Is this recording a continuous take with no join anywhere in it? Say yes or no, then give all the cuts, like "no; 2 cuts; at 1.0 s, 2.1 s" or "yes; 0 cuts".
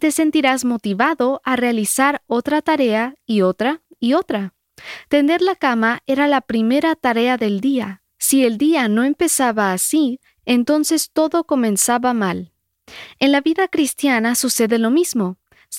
yes; 0 cuts